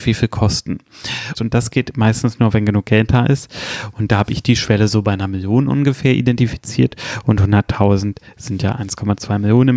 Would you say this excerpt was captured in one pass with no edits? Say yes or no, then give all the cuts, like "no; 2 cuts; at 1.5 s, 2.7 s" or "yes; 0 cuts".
no; 1 cut; at 1.4 s